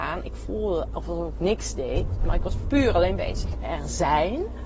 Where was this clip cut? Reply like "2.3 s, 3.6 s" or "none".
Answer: 3.5 s

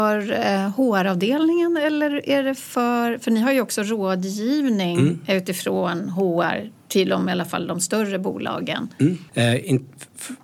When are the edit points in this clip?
9.3 s

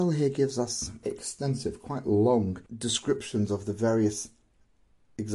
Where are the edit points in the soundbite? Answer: 1.0 s, 2.7 s

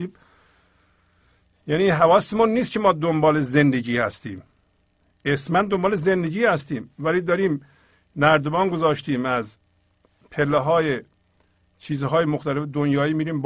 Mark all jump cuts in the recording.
none

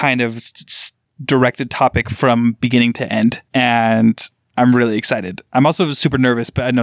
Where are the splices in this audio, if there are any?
3.4 s

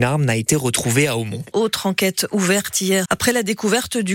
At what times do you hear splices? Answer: 1.5 s, 3.0 s

